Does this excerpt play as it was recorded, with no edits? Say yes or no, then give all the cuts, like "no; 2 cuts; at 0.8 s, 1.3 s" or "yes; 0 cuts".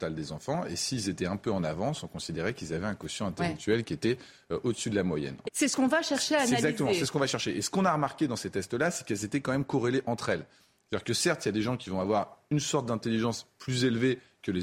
no; 1 cut; at 5.4 s